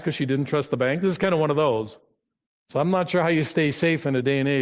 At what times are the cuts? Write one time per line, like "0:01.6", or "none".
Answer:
0:02.5